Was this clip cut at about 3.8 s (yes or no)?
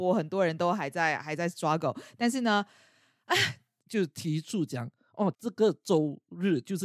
yes